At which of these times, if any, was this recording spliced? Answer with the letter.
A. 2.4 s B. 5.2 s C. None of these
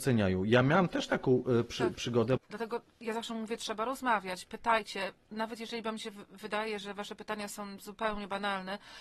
A